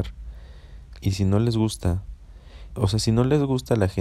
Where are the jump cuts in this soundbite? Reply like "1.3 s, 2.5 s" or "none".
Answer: 1.0 s, 2.7 s